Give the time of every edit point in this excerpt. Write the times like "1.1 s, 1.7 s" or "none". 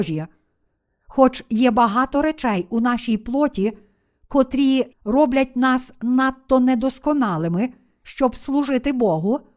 4.9 s